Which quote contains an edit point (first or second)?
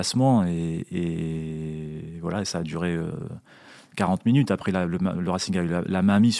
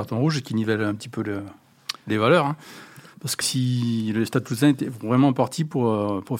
second